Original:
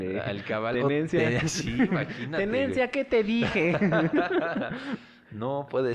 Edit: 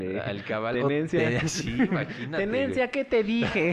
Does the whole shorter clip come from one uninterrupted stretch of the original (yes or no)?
yes